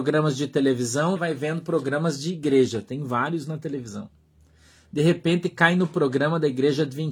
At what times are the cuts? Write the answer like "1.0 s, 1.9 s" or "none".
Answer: 1.2 s